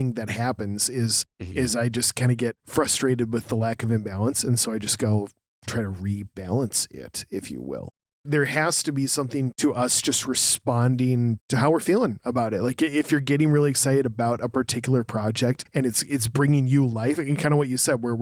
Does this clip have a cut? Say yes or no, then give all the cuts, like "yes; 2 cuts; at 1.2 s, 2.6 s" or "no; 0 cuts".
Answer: no; 0 cuts